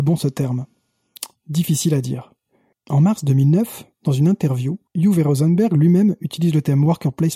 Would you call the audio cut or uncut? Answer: cut